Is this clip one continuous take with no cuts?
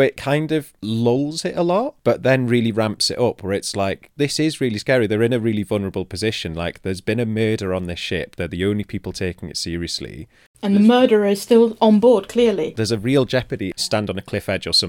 no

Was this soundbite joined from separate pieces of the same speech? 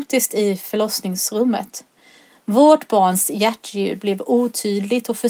no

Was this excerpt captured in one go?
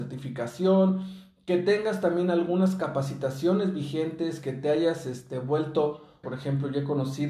no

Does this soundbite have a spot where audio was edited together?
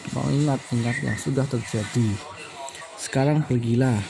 no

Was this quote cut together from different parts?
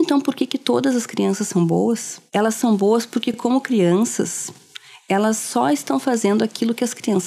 no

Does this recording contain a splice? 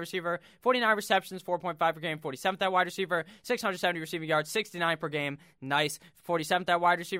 no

